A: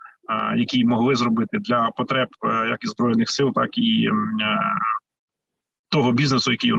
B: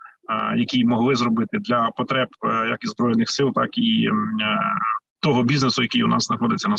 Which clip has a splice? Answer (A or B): B